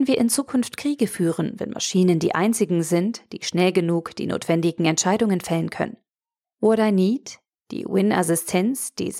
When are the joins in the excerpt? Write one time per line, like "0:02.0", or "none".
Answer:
0:06.5